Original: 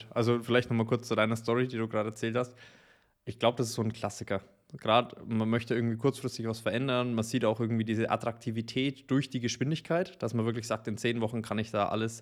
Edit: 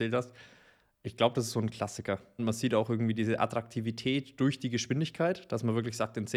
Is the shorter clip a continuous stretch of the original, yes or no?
no